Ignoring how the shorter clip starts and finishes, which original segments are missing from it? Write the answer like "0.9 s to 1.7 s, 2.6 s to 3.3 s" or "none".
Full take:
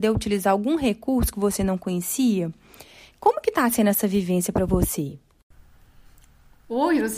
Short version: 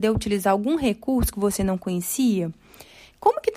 none